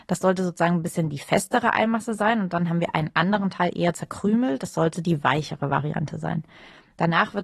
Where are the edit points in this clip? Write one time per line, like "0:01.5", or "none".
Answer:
none